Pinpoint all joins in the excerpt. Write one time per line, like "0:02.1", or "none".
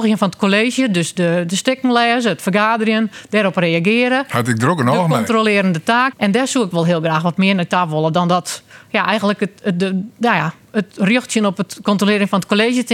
0:06.1